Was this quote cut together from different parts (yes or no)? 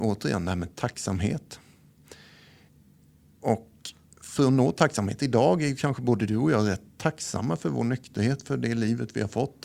no